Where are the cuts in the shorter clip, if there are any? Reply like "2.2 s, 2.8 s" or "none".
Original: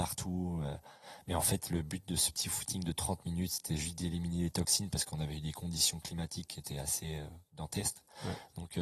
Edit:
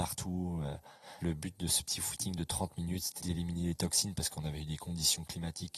1.2 s, 3.2 s